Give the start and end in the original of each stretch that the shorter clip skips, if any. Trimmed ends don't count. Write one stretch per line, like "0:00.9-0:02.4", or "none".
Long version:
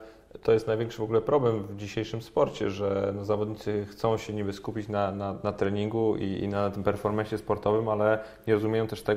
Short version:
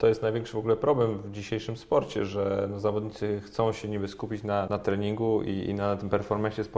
0:05.1-0:05.4